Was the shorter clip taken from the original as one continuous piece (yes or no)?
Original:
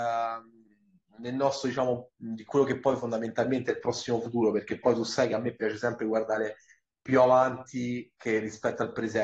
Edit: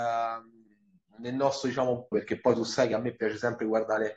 no